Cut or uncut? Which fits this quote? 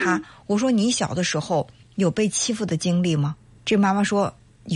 uncut